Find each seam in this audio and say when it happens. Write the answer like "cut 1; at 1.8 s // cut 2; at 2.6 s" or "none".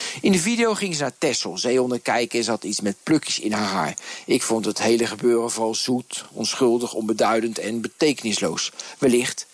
none